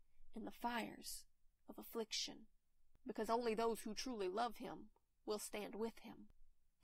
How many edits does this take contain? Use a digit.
0